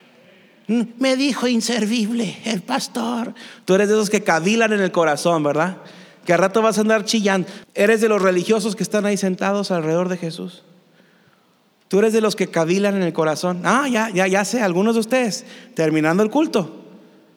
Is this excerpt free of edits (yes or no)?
no